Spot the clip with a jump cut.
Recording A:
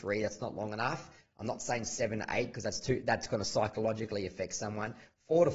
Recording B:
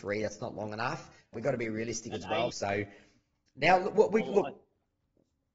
B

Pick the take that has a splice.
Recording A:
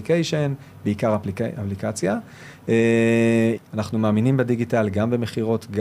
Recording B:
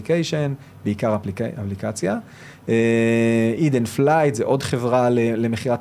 A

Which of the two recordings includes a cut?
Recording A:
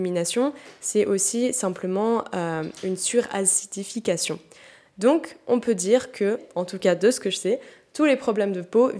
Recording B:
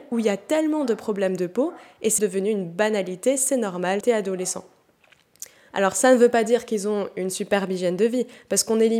B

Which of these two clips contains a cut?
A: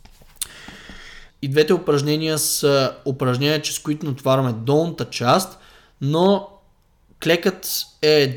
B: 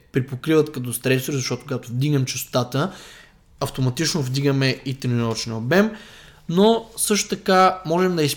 A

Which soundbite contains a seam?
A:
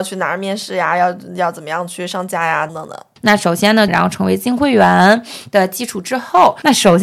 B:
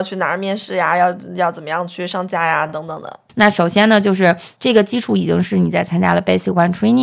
A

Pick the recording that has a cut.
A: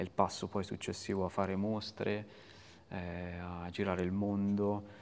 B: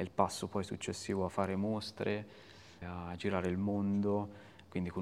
B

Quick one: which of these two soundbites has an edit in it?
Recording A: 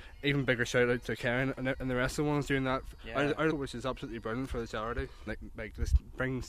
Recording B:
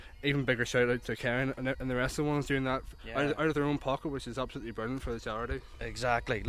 A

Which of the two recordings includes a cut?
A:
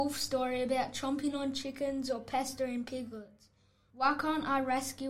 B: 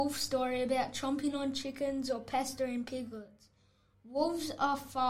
A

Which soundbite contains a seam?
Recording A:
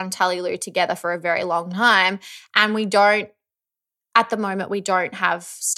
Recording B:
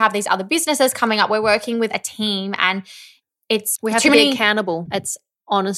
B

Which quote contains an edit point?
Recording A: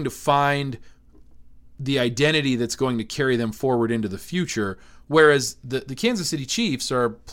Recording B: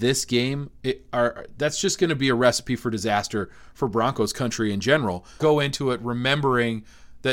B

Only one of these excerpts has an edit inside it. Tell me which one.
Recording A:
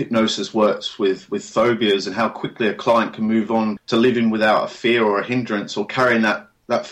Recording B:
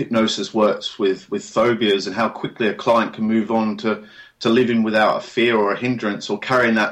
A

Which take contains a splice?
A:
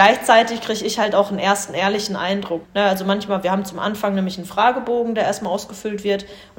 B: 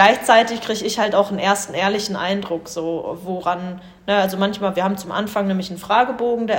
A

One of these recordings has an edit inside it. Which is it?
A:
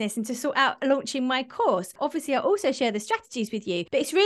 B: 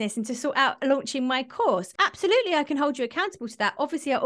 A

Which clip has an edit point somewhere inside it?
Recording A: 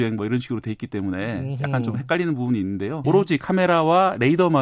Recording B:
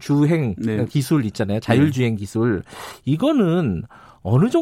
A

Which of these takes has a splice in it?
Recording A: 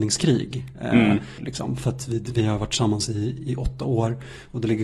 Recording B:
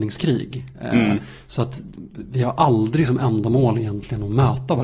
A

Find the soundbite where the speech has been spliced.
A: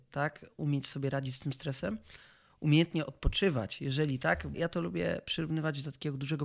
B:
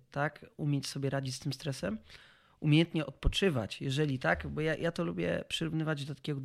A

